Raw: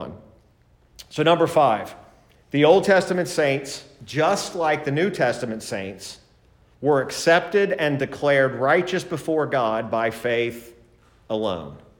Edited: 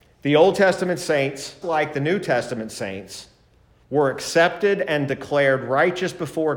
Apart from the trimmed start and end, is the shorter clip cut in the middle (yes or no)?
yes